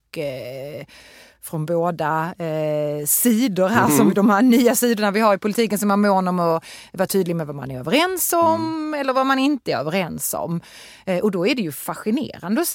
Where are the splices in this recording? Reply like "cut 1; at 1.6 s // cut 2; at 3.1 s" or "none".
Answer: none